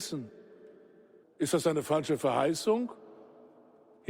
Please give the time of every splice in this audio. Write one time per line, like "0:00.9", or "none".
0:01.2